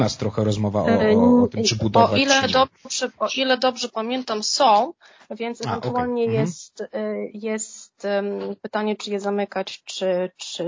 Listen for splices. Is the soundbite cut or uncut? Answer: uncut